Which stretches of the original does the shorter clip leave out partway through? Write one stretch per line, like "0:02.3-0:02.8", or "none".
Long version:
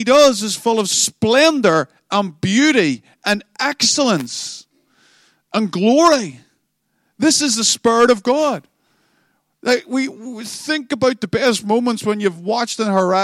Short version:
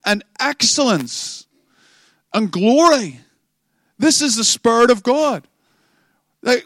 none